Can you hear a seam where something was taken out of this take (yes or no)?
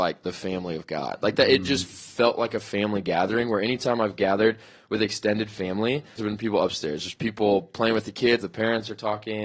yes